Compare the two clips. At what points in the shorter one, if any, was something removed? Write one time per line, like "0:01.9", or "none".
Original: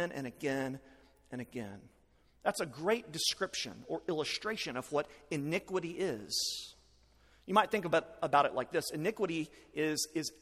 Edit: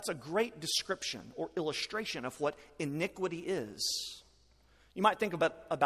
none